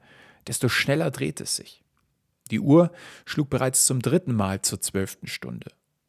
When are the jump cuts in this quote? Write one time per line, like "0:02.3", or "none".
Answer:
0:02.3